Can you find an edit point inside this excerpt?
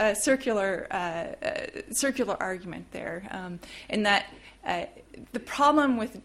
no; 0 cuts

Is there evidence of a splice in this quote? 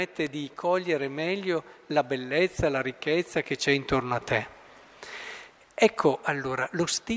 no; 0 cuts

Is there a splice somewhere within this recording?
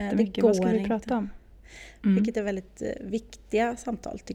yes; 1 cut; at 2.0 s

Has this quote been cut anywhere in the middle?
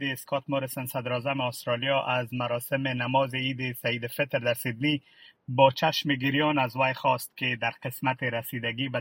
no; 0 cuts

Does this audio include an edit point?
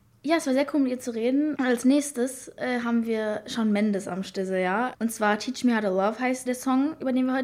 yes; 3 cuts; at 1.5 s, 4.9 s, 6.5 s

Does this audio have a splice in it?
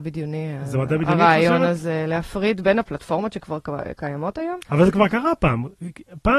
no; 0 cuts

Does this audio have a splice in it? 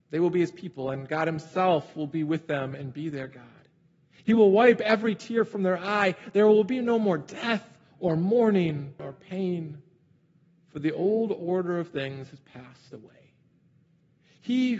yes; 1 cut; at 9.0 s

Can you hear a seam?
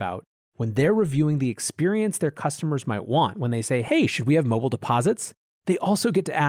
no; 0 cuts

